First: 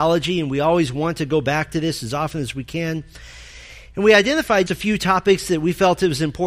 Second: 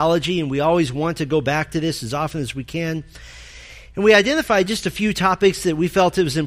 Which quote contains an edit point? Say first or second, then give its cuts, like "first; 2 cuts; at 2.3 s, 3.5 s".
first; 1 cut; at 4.7 s